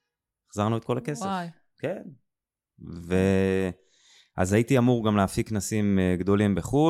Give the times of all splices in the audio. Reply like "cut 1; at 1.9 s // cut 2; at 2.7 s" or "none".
none